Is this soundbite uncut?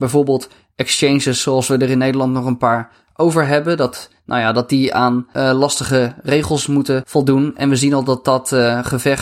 yes; 0 cuts

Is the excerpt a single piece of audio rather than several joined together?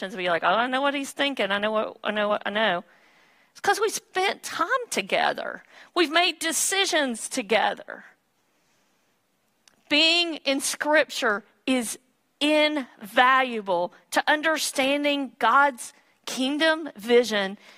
yes; 0 cuts

